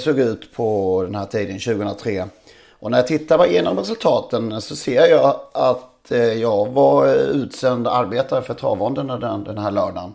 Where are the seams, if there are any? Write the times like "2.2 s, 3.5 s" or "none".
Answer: none